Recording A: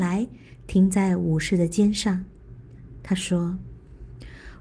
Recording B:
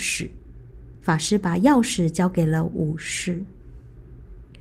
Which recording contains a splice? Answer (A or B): B